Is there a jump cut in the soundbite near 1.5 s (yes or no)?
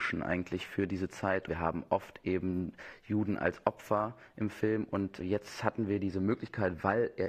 yes